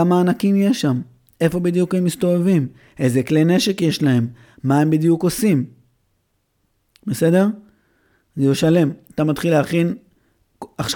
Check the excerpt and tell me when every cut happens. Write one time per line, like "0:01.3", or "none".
none

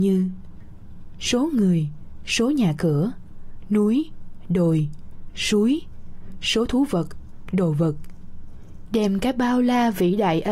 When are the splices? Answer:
0:05.3
0:08.9

